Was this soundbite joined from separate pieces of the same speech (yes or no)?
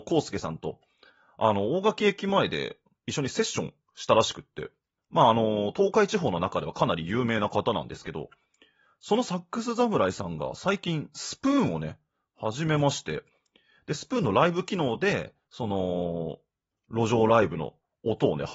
no